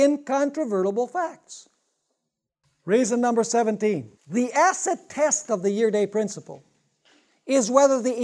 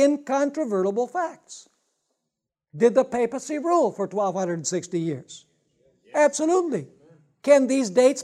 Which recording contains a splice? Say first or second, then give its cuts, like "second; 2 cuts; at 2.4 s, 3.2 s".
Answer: first; 2 cuts; at 2.6 s, 4.2 s